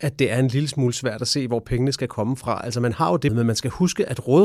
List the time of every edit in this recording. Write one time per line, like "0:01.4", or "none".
0:03.3